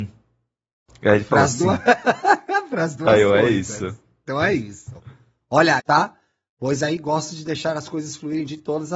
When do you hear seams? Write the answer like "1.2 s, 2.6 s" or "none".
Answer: 5.8 s